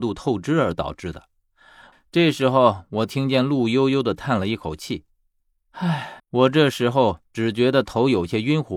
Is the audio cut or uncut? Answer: cut